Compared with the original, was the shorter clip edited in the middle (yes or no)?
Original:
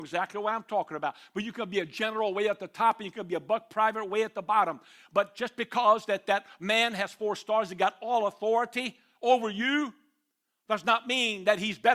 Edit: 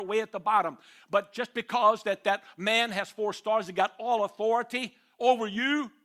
no